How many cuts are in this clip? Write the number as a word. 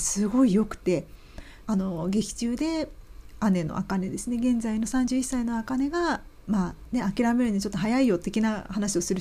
two